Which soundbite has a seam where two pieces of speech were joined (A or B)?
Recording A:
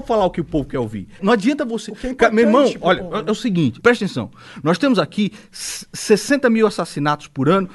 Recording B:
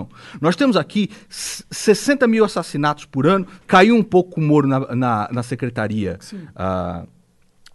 A